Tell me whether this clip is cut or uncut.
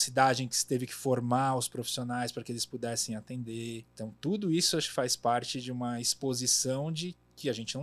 cut